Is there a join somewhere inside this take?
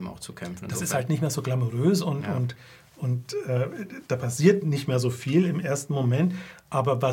no; 0 cuts

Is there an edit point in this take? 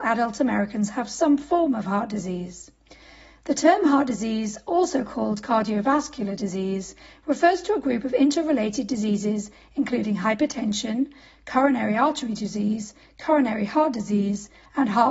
no; 0 cuts

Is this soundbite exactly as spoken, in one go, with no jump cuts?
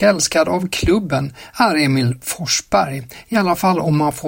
yes; 0 cuts

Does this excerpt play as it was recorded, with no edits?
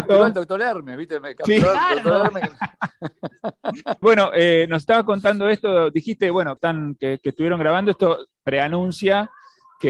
no; 2 cuts; at 4.0 s, 6.6 s

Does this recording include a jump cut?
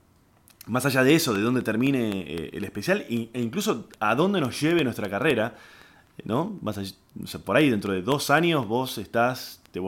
no; 0 cuts

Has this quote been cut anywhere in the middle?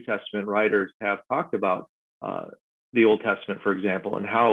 no; 0 cuts

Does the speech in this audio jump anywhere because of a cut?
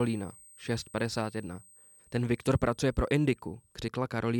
yes; 1 cut; at 2.0 s

